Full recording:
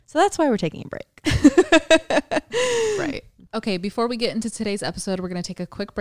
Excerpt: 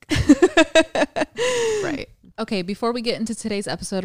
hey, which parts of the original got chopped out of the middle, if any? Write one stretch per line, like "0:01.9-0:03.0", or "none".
none